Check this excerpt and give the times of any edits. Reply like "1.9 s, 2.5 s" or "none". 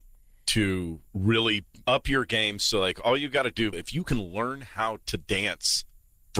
1.8 s, 3.7 s